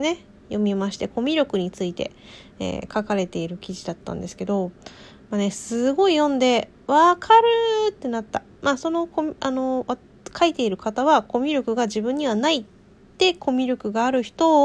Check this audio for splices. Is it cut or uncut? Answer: uncut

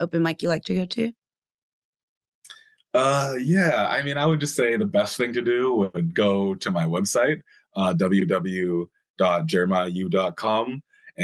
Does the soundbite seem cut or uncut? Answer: uncut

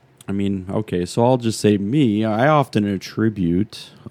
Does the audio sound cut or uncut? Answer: uncut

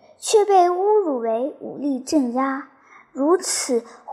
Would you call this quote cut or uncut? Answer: uncut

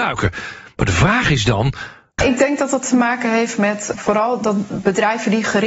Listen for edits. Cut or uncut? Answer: cut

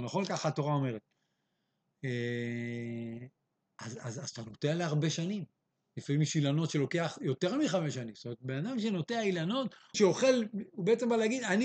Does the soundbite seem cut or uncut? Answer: cut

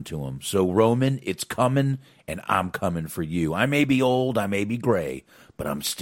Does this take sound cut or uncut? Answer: uncut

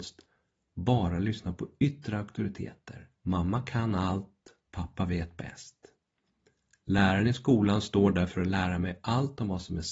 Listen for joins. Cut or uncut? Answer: cut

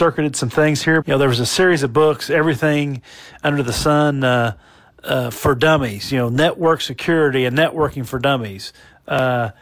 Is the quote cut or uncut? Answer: cut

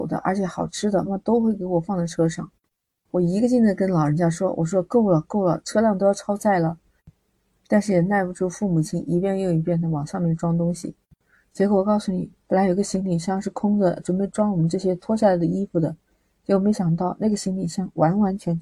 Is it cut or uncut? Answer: cut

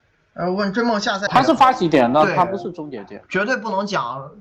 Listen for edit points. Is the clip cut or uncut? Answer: cut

